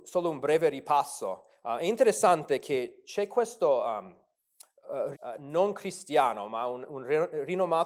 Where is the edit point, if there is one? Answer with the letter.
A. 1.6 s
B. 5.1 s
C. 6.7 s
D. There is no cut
B